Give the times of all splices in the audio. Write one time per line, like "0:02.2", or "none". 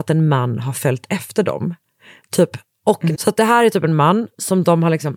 0:03.1